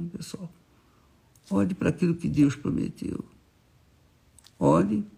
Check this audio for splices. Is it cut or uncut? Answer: uncut